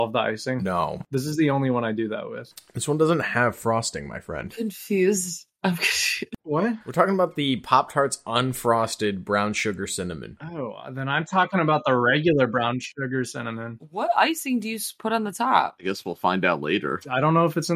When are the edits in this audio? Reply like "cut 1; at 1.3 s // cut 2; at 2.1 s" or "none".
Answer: none